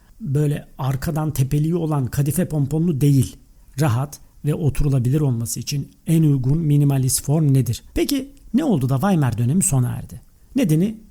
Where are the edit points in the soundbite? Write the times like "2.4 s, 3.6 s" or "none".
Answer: 7.9 s